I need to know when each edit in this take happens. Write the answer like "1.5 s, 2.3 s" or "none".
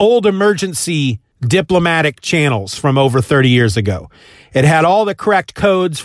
none